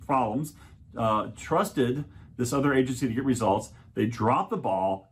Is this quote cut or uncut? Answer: uncut